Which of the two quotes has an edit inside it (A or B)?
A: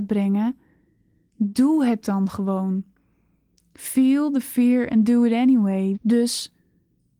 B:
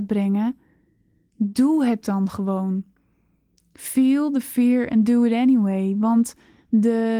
A